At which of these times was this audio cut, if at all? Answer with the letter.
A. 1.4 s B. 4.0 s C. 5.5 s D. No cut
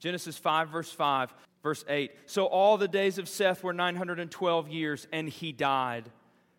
A